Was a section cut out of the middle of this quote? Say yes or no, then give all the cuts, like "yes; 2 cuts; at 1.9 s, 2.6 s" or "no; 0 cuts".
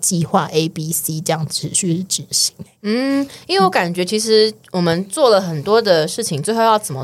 no; 0 cuts